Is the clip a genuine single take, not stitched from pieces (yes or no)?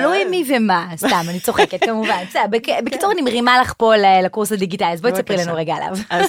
yes